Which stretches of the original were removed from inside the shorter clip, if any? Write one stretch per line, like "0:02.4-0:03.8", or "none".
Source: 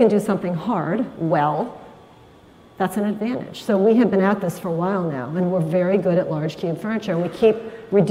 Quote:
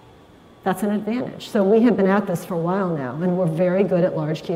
none